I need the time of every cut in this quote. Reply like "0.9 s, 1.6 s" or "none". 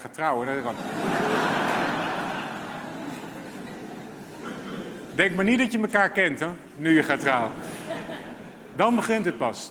none